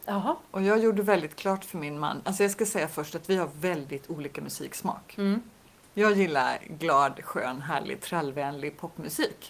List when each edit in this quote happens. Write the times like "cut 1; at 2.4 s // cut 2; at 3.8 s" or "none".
none